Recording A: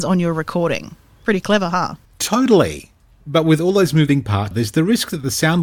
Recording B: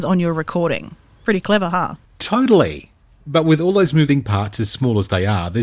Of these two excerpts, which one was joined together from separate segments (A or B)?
A